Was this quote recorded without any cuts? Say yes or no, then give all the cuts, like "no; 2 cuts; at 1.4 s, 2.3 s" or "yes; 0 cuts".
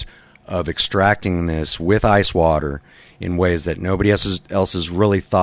yes; 0 cuts